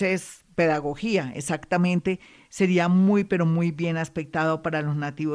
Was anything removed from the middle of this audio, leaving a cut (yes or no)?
no